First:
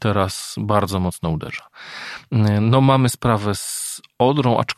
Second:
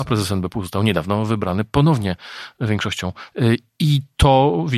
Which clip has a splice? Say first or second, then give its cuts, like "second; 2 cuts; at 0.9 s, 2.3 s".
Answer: second; 1 cut; at 3.3 s